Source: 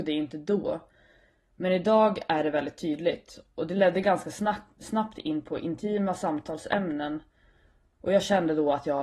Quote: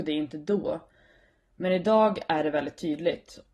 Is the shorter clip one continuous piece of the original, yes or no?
yes